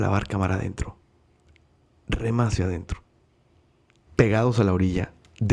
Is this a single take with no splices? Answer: no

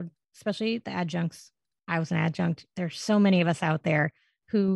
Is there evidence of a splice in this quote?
no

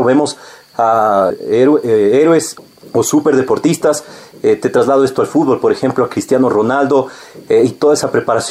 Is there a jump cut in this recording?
no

